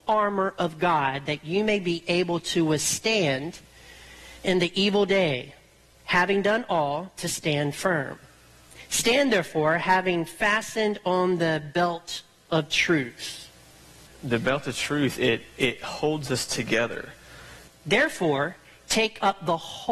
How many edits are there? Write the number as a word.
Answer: two